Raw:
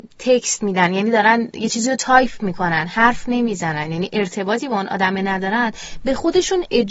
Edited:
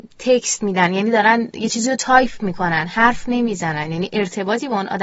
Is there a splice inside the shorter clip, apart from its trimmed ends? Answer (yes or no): no